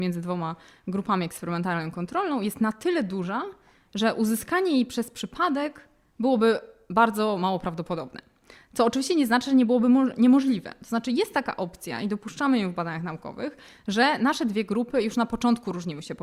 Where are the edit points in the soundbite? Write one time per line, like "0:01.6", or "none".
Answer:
none